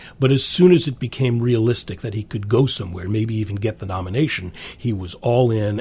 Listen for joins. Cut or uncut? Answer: uncut